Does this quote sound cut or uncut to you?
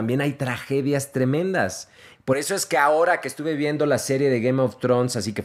cut